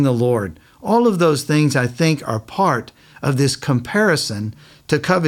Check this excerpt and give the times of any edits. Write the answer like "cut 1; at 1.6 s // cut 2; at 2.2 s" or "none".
none